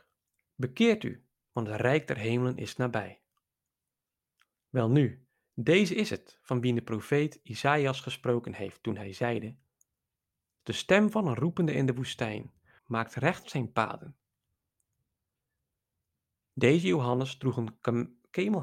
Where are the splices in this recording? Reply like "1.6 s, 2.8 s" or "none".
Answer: 12.8 s